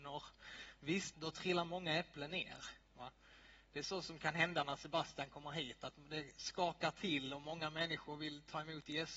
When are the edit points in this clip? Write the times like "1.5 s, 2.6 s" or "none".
1.1 s